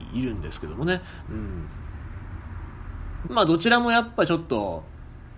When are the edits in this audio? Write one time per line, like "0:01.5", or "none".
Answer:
0:01.2
0:03.2